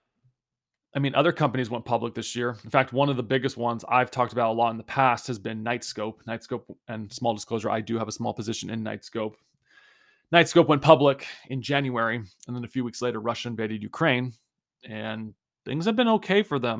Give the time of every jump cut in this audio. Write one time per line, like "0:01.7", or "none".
none